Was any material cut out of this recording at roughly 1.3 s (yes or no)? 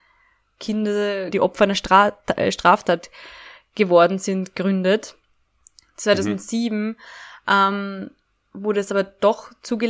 yes